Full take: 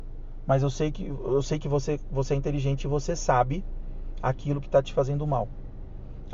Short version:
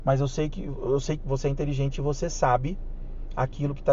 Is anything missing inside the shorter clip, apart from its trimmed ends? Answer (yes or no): yes